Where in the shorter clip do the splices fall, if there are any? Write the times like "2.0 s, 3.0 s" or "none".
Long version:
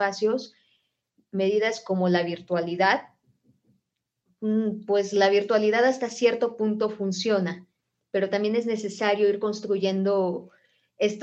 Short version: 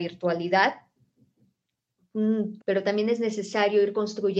2.6 s